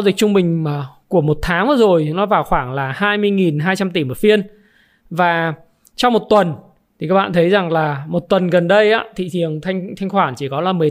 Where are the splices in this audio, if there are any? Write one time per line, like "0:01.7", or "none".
none